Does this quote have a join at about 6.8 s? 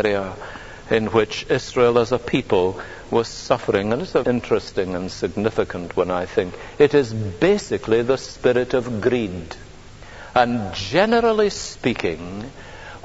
no; 1 cut; at 4.2 s

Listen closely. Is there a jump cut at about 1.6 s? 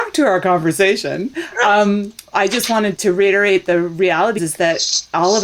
no; 2 cuts; at 2.9 s, 4.4 s

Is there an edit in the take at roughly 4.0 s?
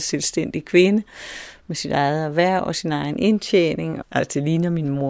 yes; 1 cut; at 4.0 s

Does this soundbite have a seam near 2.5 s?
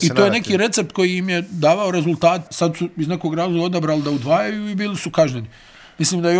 yes; 1 cut; at 2.5 s

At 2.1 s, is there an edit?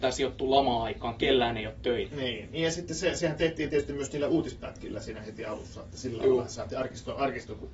yes; 1 cut; at 2.1 s

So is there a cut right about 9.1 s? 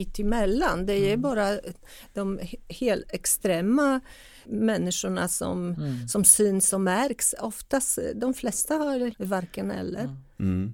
yes; 2 cuts; at 4.4 s, 9.1 s

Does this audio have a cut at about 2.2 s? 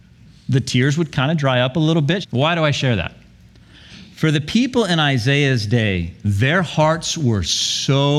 yes; 1 cut; at 2.2 s

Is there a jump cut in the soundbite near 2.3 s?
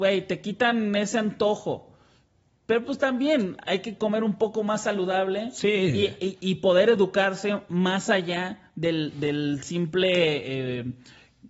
no; 0 cuts

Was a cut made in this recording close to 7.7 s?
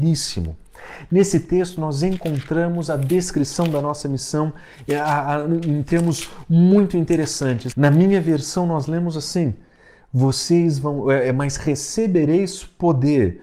yes; 1 cut; at 7.7 s

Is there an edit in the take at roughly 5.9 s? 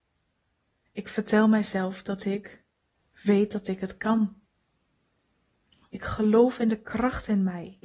yes; 1 cut; at 5.9 s

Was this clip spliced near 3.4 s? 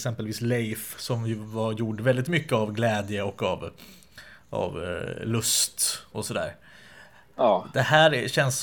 no; 0 cuts

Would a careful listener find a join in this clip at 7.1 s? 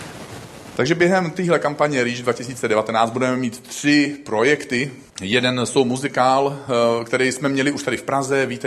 no; 1 cut; at 5.1 s

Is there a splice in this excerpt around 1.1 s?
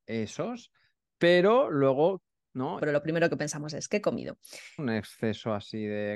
no; 2 cuts; at 2.8 s, 4.8 s

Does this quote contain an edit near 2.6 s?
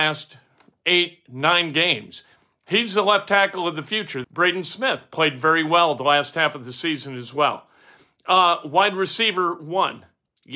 no; 1 cut; at 4.2 s

